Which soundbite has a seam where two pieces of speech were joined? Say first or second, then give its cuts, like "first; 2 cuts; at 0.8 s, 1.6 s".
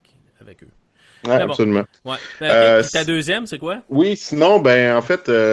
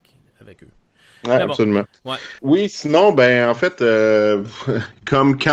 second; 1 cut; at 2.4 s